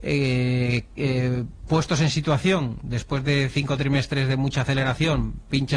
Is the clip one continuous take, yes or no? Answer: yes